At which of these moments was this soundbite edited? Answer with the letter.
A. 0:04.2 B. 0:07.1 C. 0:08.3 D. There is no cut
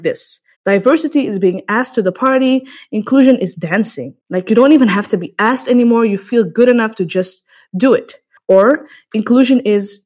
A